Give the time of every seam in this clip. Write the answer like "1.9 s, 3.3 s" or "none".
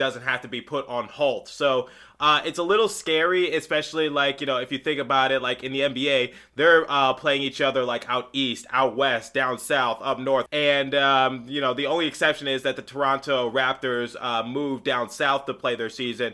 10.5 s